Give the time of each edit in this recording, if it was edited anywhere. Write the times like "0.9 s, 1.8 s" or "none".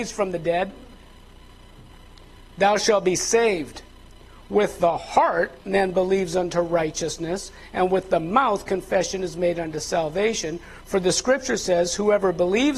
none